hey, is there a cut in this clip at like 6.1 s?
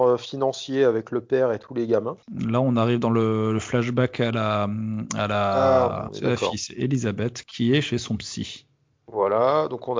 yes; 3 cuts; at 2.2 s, 6.1 s, 7.4 s

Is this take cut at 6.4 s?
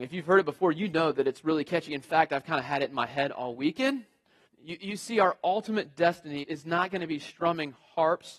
yes; 2 cuts; at 4.5 s, 6.4 s

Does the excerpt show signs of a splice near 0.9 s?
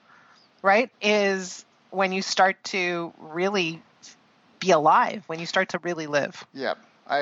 yes; 1 cut; at 0.9 s

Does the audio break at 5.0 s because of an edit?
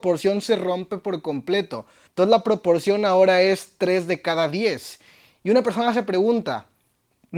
no; 1 cut; at 2.1 s

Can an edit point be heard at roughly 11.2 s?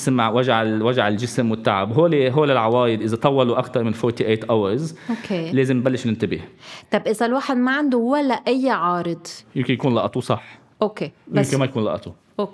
no; 0 cuts

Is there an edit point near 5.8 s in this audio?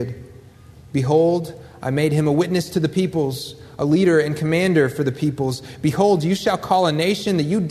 no; 0 cuts

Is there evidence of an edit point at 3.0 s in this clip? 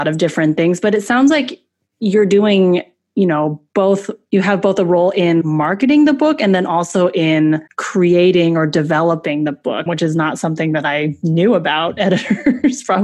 no; 3 cuts; at 5.4 s, 7.7 s, 9.9 s

